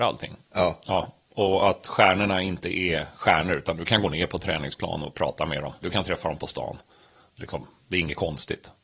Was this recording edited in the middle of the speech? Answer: yes; 1 cut; at 5.8 s

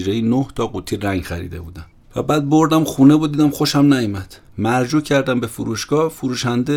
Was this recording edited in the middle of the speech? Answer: yes; 1 cut; at 4.5 s

